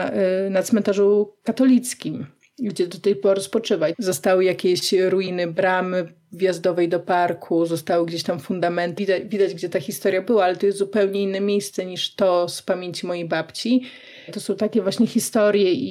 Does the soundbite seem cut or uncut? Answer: cut